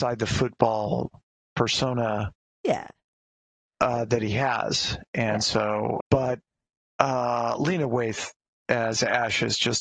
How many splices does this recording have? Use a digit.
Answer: 1